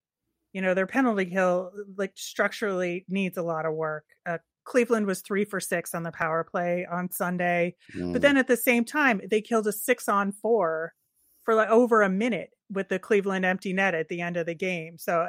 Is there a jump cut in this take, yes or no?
yes